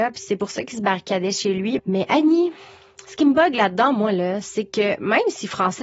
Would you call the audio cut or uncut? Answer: cut